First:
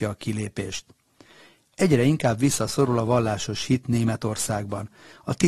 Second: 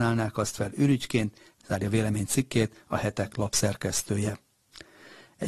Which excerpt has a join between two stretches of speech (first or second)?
second